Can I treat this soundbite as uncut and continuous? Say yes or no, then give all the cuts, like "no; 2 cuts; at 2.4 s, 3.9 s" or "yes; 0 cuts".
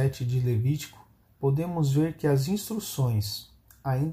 no; 1 cut; at 1.2 s